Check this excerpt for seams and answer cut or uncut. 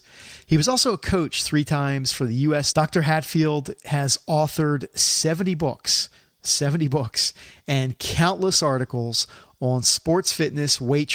cut